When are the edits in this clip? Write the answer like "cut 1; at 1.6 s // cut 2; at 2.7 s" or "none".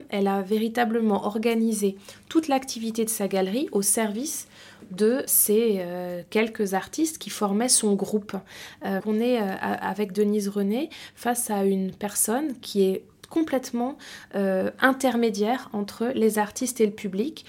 cut 1; at 5.3 s // cut 2; at 9.0 s